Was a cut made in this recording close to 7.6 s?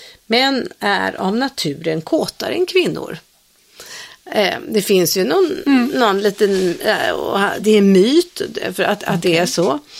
yes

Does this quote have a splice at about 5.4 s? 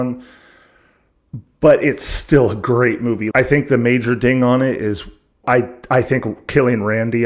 yes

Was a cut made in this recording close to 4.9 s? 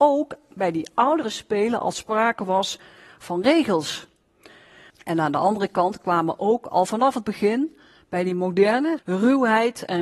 yes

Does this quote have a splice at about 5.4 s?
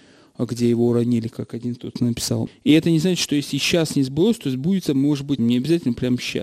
yes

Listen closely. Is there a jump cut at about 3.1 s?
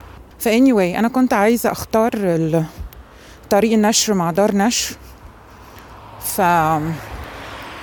no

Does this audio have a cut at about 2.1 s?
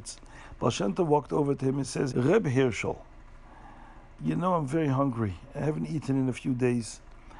yes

